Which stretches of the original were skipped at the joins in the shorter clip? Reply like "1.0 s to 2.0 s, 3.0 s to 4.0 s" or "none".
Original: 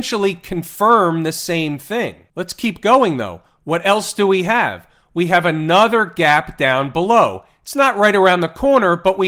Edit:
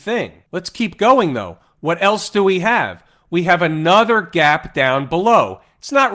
none